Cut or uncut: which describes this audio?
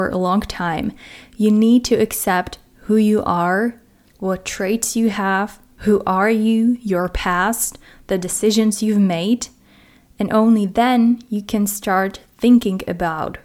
cut